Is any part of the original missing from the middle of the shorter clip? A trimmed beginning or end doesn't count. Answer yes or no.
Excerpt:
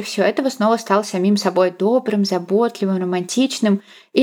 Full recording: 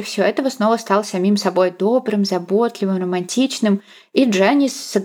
no